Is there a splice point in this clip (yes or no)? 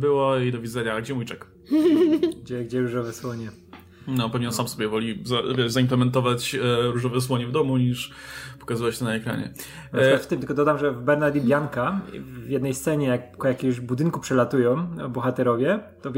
no